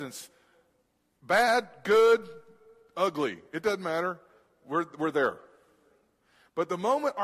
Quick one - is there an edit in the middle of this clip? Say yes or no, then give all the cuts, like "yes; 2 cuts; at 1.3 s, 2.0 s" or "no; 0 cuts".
no; 0 cuts